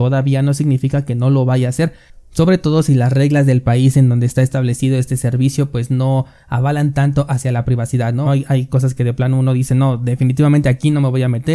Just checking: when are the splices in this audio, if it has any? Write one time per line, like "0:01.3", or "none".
0:08.3